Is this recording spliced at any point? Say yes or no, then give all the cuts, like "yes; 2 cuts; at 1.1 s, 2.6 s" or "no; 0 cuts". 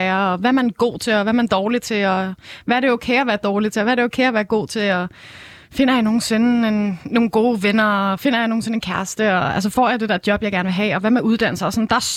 no; 0 cuts